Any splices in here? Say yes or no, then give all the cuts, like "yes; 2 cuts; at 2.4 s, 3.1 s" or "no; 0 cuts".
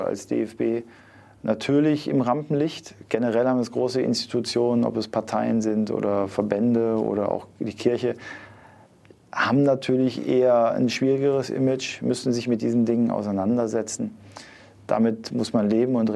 no; 0 cuts